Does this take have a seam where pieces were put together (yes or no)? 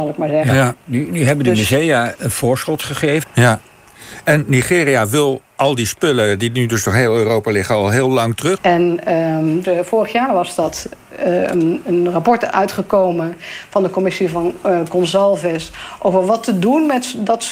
yes